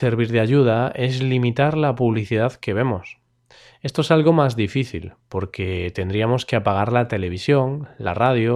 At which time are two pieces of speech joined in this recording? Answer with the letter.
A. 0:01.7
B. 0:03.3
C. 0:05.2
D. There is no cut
D